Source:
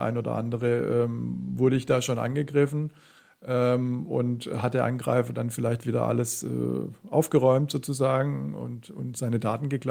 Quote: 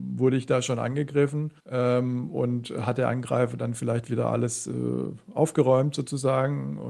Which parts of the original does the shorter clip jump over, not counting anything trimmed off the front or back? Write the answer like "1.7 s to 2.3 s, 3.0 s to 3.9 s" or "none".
3.0 s to 3.3 s